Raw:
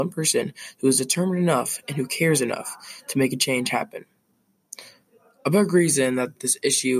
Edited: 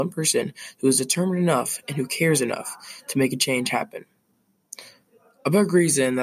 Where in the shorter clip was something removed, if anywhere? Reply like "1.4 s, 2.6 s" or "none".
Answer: none